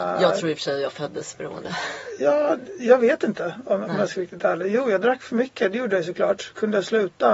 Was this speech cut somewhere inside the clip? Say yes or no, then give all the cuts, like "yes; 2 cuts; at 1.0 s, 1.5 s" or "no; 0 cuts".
no; 0 cuts